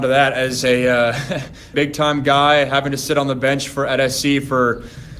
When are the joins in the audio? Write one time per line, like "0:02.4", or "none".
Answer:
0:01.7

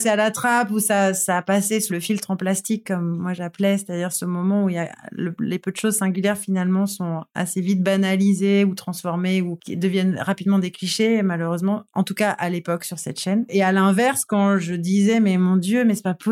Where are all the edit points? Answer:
0:01.9

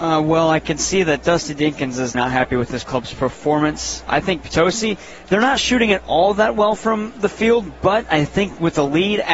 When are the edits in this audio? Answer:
0:02.1

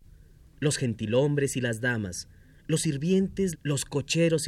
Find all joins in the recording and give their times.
0:03.5

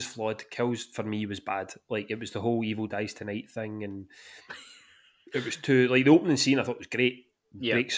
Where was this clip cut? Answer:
none

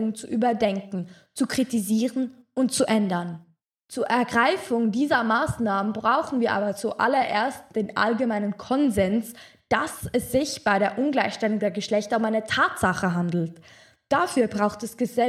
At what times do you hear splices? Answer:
none

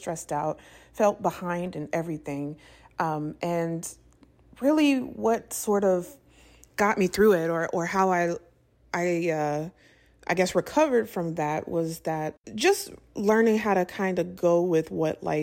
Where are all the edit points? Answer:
none

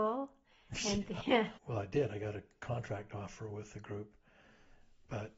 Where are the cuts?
0:01.6

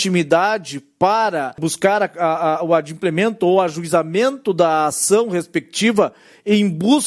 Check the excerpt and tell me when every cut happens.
none

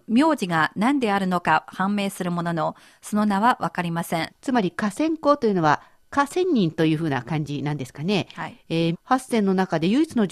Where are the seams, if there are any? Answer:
0:04.3
0:08.9

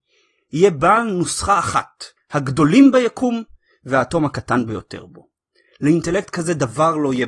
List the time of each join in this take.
0:02.2

